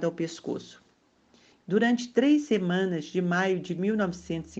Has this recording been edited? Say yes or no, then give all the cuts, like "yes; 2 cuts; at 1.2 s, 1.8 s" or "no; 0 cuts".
yes; 1 cut; at 1.6 s